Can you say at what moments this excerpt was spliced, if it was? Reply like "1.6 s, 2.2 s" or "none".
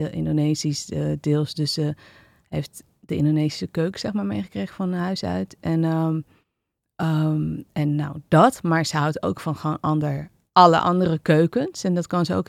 none

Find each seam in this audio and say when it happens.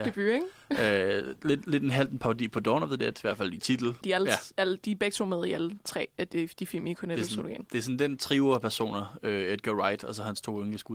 4.0 s

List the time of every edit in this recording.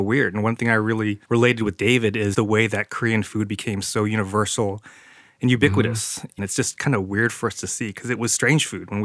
1.2 s, 2.3 s, 6.4 s

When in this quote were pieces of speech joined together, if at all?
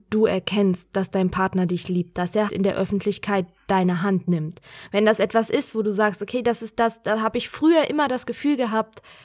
2.5 s

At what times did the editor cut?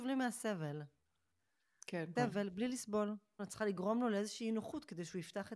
2.2 s, 3.4 s

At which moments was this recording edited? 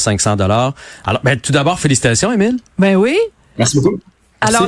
none

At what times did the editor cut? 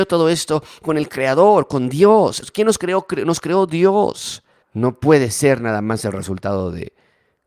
2.4 s, 4.6 s

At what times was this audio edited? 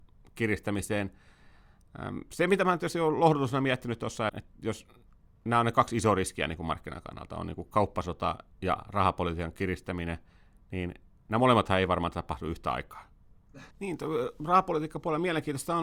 4.3 s, 8.5 s, 13.7 s

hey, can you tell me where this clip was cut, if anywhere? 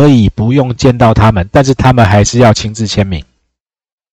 none

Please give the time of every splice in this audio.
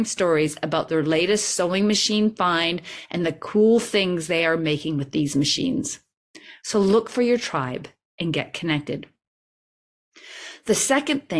none

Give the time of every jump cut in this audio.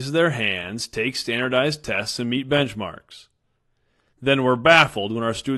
none

